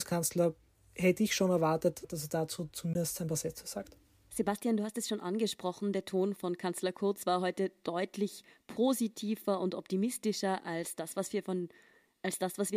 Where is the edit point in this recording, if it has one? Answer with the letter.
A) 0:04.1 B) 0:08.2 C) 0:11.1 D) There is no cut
D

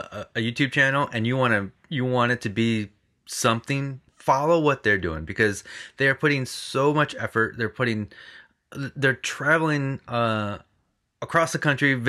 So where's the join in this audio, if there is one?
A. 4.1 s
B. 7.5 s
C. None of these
A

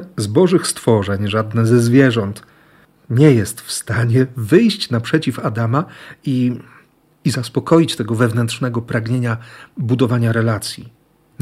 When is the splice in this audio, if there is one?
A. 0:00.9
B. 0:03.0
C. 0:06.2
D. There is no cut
D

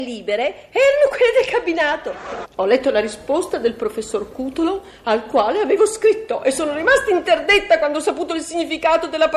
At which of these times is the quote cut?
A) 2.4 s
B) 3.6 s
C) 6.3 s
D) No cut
A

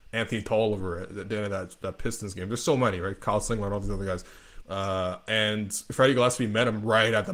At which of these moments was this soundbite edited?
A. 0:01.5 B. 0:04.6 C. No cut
B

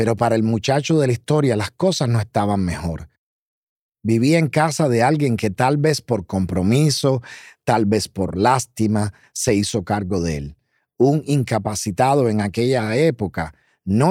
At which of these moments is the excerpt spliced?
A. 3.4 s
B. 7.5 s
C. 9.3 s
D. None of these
C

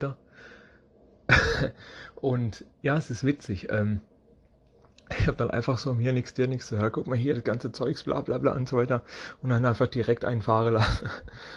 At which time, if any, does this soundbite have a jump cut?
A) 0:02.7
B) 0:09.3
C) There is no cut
A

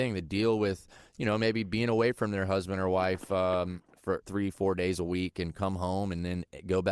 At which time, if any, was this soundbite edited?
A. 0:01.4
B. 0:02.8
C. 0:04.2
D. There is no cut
C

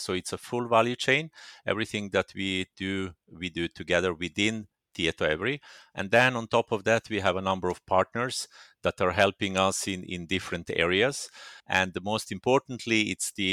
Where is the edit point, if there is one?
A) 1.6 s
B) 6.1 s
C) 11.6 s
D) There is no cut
C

